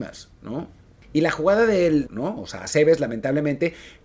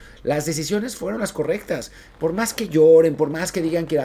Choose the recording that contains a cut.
first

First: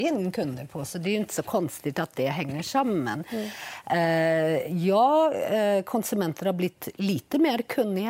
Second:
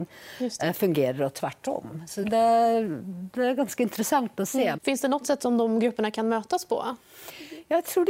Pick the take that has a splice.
second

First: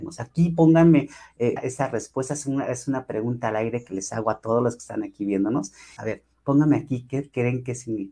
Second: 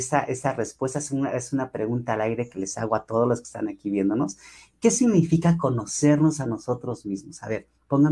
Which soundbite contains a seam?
first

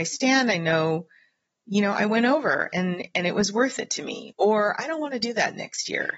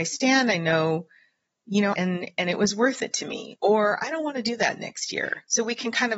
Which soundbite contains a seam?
second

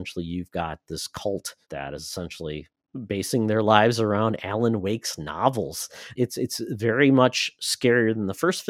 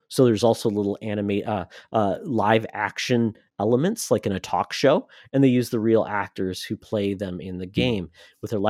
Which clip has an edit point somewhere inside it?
first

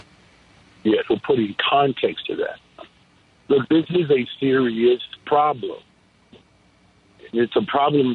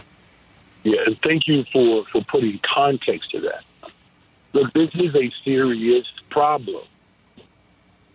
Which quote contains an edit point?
first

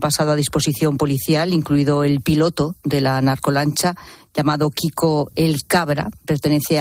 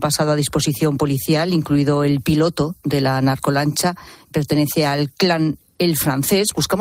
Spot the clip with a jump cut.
second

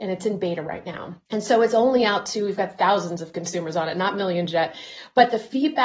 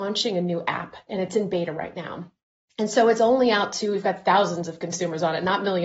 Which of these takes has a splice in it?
first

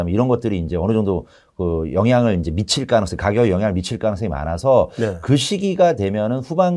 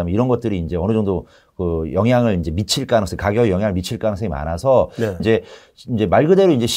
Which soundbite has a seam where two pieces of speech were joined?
second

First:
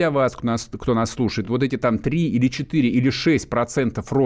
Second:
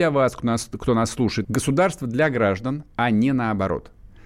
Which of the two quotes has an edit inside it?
second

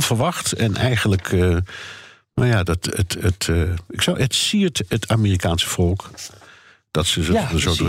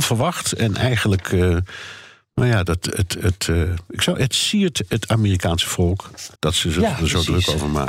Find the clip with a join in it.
second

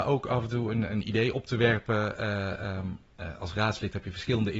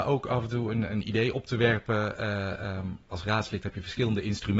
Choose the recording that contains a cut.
second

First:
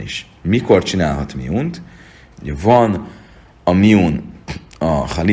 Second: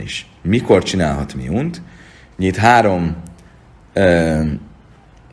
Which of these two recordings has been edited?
first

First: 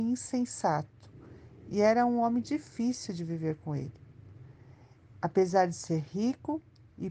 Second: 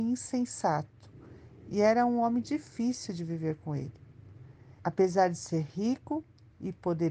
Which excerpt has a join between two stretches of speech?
second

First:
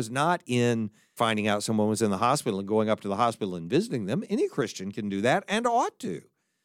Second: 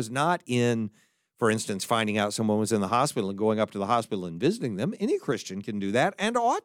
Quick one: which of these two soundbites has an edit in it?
first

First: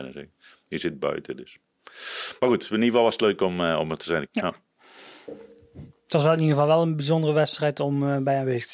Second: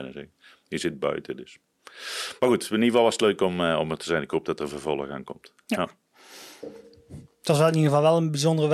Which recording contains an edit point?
first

